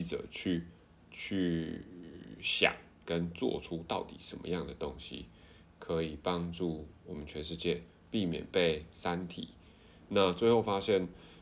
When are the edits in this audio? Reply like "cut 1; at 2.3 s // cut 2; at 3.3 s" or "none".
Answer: cut 1; at 10.0 s